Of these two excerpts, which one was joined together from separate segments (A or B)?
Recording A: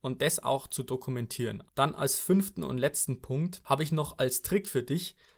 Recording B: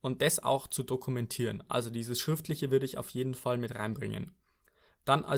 A